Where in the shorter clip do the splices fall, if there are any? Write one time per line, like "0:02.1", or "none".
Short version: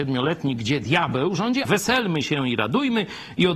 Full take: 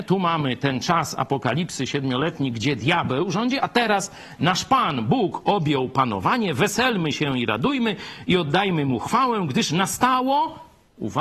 0:01.6